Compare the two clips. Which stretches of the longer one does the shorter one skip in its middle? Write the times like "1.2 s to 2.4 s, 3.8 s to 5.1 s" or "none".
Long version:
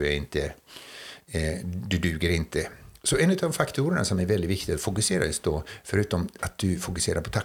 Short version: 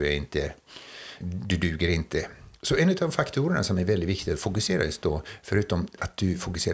1.2 s to 1.6 s